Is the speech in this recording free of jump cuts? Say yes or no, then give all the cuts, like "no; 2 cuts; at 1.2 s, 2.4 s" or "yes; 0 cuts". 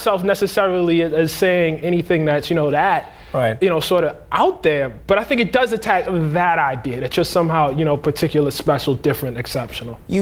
yes; 0 cuts